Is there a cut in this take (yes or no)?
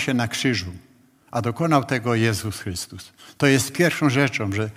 no